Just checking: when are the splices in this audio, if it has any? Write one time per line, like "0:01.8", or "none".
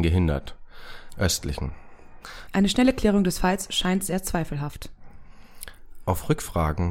0:01.1
0:02.5